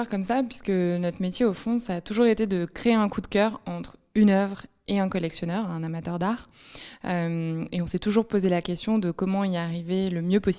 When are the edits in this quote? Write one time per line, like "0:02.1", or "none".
none